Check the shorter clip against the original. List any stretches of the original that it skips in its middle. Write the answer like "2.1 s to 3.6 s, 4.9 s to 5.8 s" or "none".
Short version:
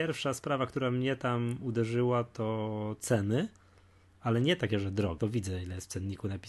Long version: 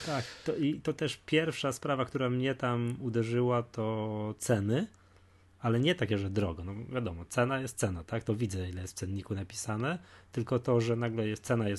6.6 s to 8.2 s